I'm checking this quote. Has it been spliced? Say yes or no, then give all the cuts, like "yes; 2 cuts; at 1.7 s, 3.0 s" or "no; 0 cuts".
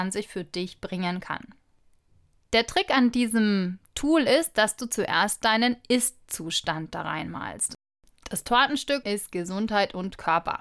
yes; 1 cut; at 9.0 s